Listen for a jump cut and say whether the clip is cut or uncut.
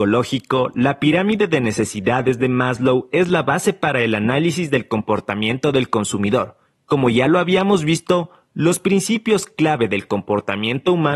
uncut